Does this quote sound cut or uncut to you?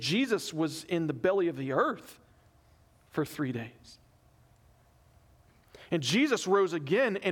uncut